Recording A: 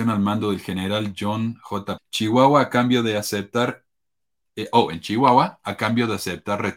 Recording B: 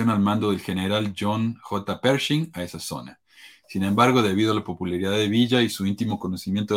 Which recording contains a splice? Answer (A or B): A